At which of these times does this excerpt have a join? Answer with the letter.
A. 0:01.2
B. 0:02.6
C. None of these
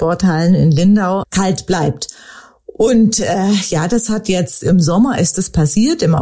A